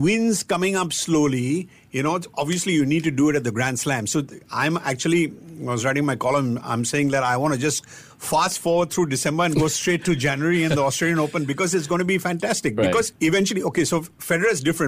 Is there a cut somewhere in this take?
no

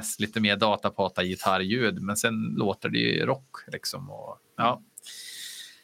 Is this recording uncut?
yes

